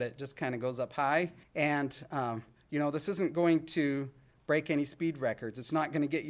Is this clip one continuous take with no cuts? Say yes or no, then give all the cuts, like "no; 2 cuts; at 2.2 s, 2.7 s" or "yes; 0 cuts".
no; 1 cut; at 1.4 s